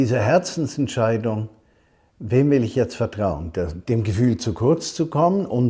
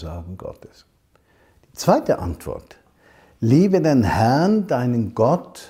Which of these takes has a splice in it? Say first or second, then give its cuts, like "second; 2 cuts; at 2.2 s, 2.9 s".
first; 1 cut; at 3.8 s